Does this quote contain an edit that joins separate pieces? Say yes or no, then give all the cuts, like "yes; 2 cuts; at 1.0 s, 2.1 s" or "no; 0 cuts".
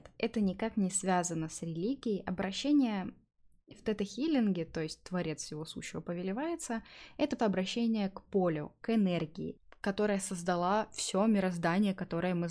yes; 1 cut; at 7.4 s